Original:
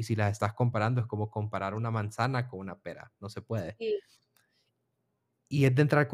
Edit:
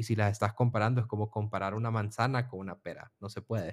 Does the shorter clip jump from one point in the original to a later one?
no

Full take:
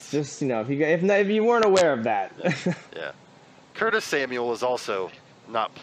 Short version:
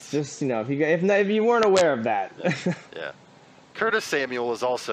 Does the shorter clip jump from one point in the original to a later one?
no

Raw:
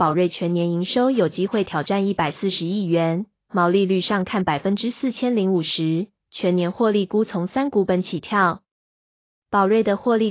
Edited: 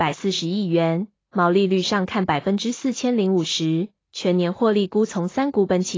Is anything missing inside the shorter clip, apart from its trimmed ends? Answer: no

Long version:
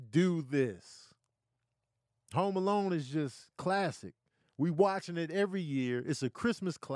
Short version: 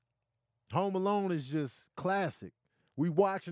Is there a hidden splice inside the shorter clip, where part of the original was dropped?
no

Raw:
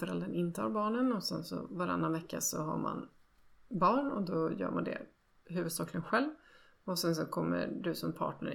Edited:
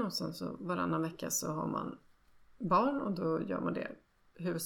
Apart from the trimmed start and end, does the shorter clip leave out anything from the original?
no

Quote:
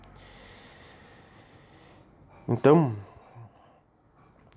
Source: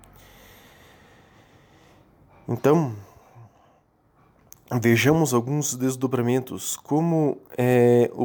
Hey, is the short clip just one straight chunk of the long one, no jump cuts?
yes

